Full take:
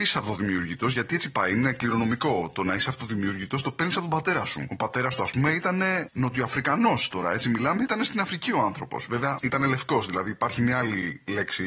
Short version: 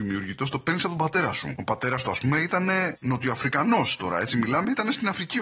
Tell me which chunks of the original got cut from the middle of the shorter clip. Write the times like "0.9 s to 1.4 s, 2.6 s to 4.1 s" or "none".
none